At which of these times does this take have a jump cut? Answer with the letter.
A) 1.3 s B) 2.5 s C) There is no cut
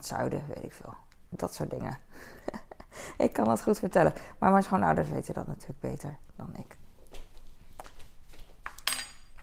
A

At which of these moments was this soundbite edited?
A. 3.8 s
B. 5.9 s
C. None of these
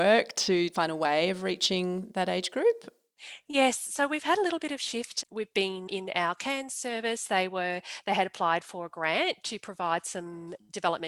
B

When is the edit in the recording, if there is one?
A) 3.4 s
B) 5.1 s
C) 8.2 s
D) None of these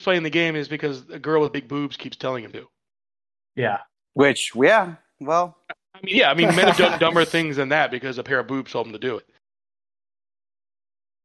D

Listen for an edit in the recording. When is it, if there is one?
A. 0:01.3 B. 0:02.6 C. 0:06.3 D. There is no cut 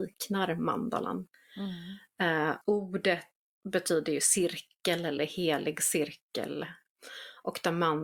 B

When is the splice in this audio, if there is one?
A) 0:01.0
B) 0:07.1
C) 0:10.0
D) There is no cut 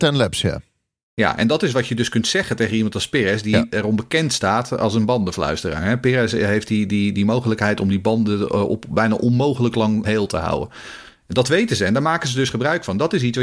C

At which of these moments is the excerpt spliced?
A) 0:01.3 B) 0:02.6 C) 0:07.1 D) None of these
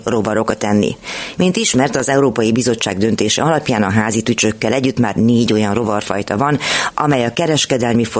A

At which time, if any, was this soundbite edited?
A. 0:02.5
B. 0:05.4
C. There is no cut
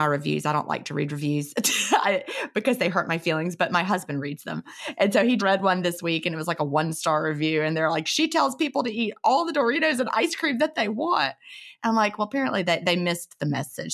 B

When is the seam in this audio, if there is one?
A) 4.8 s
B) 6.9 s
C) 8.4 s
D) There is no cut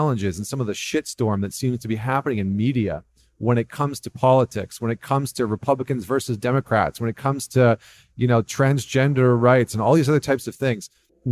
D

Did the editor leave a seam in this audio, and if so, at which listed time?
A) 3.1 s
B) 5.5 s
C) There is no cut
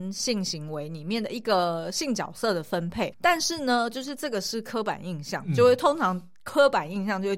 A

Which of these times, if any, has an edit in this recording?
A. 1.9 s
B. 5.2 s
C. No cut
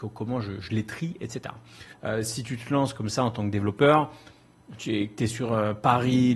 A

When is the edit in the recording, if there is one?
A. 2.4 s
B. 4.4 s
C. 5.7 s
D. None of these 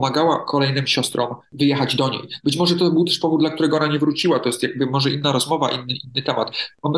D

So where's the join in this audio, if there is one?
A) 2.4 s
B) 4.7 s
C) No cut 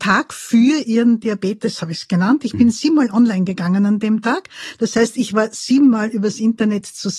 C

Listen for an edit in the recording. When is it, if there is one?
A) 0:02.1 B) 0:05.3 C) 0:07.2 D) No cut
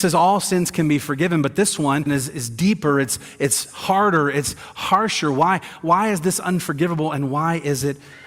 A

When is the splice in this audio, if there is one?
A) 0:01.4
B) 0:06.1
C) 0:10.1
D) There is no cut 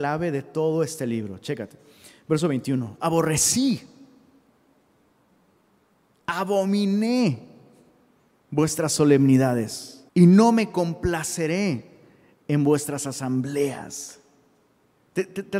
C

